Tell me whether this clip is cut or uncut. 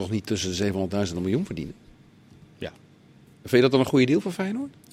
uncut